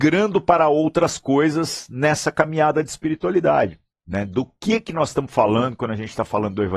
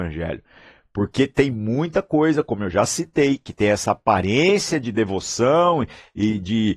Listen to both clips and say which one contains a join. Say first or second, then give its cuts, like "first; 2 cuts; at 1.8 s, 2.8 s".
first; 1 cut; at 3.9 s